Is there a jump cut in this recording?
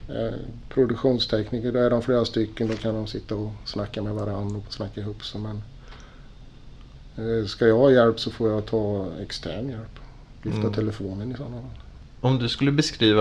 no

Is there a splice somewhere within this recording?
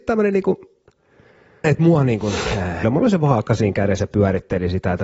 yes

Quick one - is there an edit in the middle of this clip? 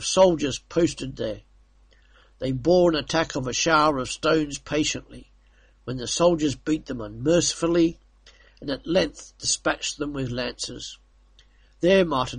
no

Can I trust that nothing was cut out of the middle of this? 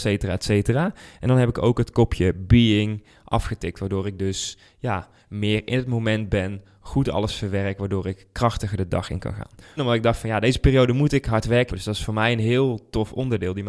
no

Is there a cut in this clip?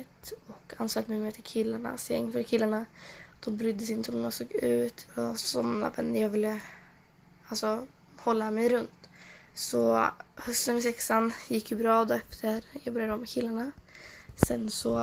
yes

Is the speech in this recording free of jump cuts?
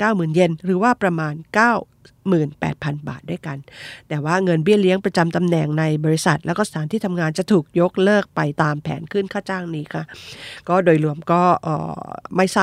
no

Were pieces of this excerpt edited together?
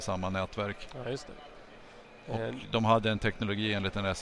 no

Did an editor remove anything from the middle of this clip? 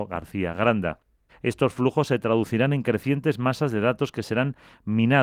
yes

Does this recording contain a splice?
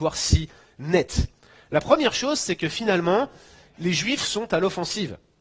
no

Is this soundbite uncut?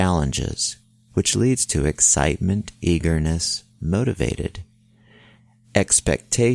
yes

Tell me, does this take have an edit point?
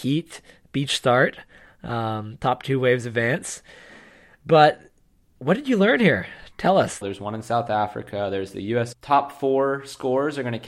yes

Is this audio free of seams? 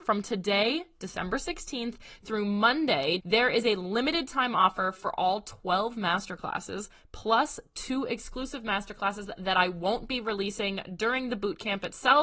no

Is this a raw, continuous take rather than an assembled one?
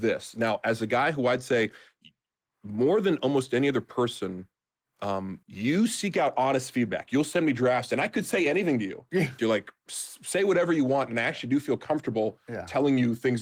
no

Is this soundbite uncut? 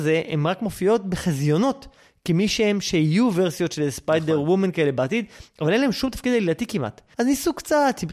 no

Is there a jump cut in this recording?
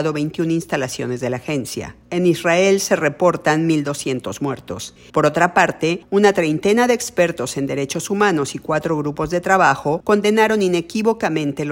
yes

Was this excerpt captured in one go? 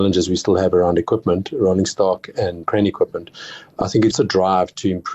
no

